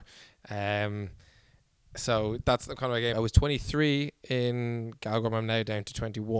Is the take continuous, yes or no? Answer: no